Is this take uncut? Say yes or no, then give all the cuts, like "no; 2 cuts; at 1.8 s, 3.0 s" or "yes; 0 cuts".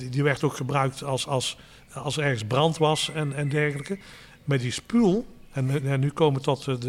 yes; 0 cuts